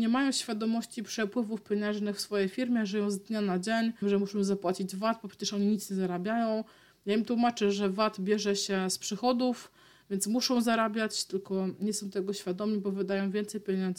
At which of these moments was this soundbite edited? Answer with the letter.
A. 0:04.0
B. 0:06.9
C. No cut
A